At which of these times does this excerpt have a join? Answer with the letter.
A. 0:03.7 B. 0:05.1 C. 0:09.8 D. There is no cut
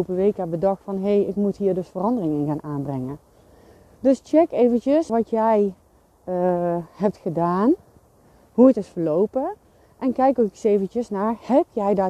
B